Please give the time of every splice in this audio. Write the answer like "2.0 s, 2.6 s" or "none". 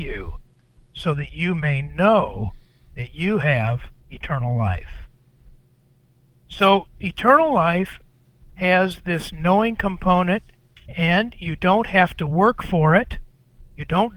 4.0 s